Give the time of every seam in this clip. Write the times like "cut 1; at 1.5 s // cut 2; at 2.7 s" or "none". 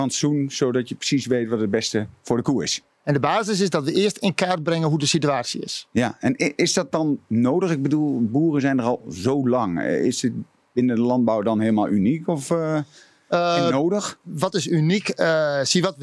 cut 1; at 2.9 s